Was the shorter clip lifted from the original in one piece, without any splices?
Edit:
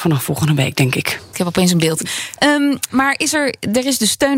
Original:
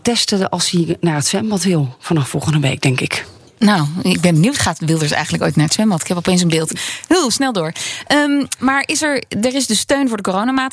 no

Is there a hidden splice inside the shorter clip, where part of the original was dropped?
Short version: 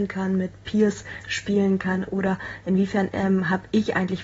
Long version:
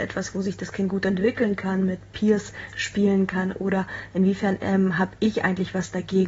no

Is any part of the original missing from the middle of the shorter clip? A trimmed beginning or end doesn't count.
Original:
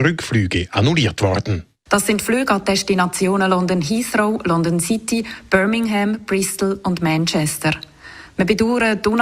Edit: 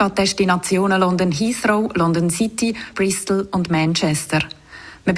yes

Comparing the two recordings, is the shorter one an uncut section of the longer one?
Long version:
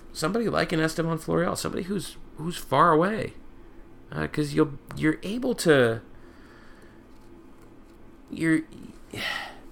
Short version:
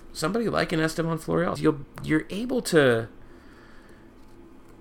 no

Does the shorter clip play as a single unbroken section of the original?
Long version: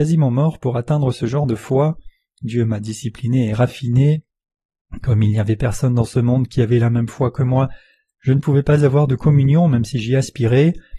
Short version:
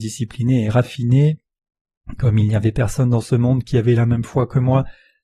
yes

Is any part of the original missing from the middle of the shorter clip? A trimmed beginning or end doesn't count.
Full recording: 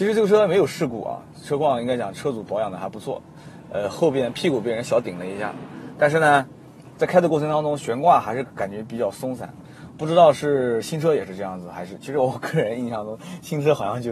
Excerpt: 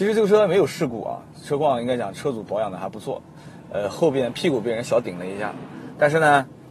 no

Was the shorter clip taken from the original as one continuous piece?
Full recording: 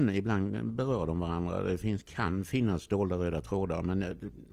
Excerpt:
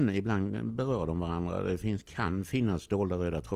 yes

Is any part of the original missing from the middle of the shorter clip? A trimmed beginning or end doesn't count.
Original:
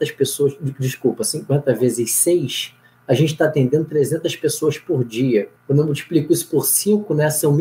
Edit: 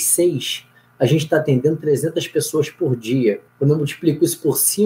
no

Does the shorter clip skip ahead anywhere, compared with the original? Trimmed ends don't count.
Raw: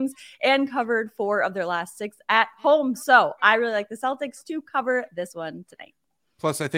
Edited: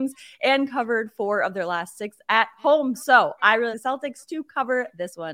yes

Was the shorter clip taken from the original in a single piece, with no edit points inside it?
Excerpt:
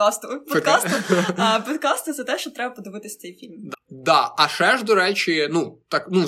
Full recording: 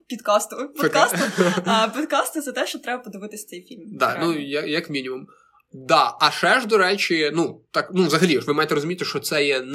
no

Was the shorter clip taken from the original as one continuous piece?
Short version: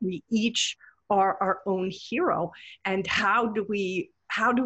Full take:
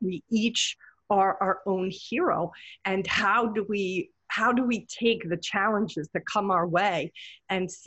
yes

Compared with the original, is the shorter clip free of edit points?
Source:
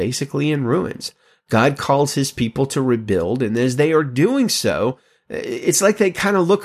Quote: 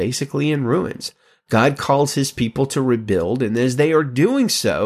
yes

